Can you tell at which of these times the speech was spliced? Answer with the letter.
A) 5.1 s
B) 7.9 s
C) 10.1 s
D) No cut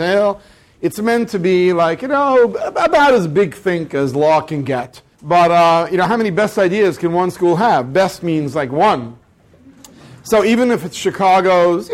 A